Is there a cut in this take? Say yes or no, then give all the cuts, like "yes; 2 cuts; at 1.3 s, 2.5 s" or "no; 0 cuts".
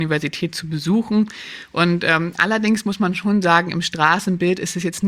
no; 0 cuts